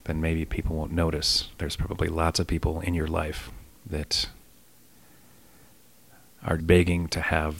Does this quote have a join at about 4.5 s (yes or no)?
no